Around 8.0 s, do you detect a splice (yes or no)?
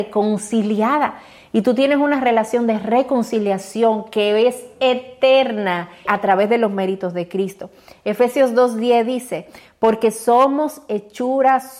no